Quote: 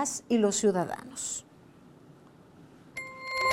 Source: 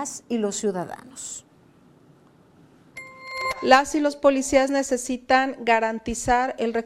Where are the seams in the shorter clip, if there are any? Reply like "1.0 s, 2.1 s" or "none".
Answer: none